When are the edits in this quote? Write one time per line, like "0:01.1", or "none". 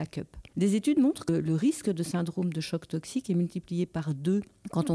none